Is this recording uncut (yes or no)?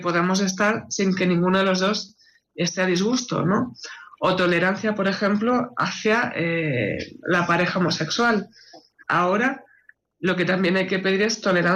no